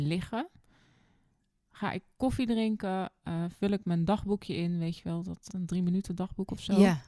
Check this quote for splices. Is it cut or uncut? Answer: cut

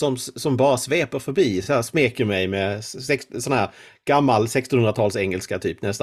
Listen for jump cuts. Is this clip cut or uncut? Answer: uncut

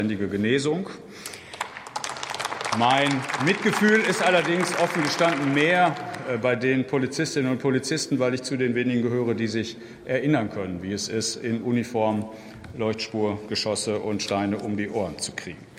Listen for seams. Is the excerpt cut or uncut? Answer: uncut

